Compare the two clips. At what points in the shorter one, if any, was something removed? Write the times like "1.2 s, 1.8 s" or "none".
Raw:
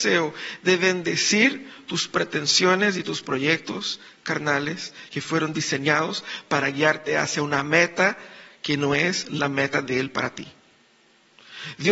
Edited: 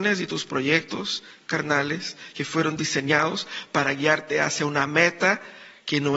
none